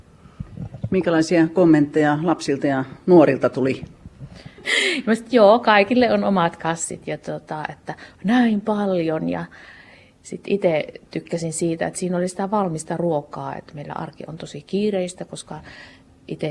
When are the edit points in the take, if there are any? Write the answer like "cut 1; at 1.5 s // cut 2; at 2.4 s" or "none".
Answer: cut 1; at 4.6 s